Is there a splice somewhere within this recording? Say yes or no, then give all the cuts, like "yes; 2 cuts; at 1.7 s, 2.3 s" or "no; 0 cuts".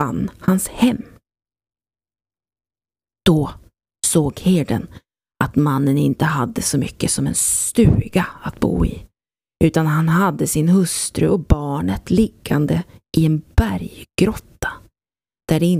no; 0 cuts